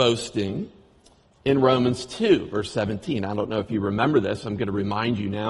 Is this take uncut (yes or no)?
yes